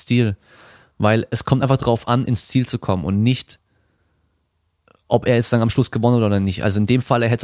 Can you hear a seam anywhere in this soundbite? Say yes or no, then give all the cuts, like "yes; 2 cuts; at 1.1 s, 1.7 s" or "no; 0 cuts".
no; 0 cuts